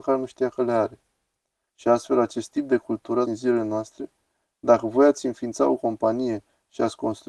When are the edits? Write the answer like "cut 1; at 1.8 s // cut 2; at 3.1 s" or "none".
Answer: cut 1; at 1.7 s // cut 2; at 3.2 s

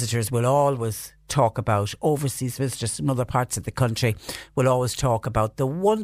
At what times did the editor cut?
cut 1; at 2.6 s

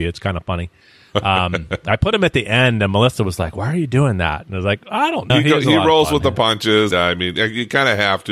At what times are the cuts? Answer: cut 1; at 5.3 s // cut 2; at 6.9 s

